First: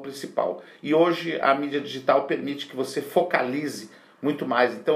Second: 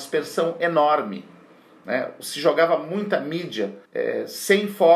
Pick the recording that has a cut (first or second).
second